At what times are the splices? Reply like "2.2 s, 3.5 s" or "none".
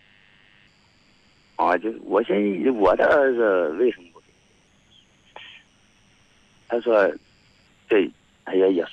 none